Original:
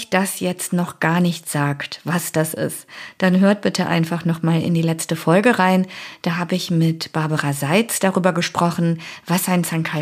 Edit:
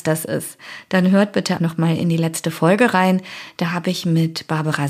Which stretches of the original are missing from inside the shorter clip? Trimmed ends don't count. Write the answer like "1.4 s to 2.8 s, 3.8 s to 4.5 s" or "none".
3.9 s to 4.2 s